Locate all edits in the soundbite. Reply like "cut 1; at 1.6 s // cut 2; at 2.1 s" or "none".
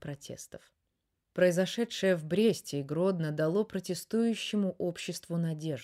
none